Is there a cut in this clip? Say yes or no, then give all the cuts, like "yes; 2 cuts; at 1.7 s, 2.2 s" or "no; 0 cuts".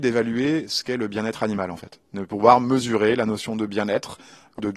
no; 0 cuts